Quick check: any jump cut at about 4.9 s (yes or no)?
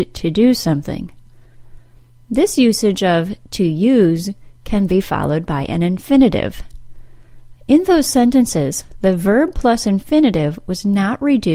yes